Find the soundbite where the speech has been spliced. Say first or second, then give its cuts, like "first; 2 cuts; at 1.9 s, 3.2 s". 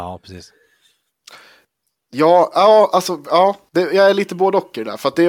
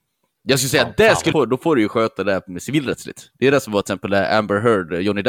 second; 1 cut; at 1.3 s